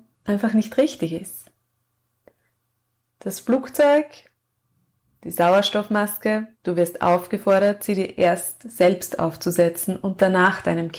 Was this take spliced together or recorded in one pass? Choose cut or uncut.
cut